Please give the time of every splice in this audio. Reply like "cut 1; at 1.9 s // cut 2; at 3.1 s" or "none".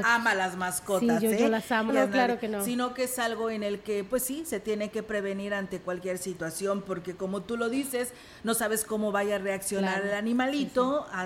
cut 1; at 1.9 s